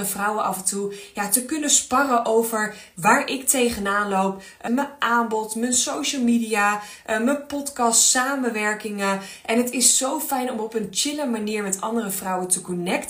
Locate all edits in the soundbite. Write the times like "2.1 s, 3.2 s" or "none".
4.7 s